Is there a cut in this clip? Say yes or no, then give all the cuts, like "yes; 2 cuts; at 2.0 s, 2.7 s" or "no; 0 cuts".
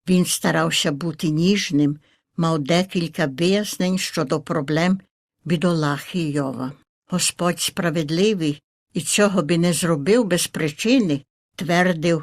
no; 0 cuts